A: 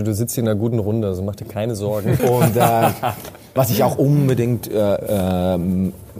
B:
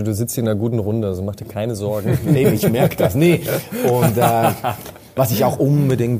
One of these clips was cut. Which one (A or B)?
A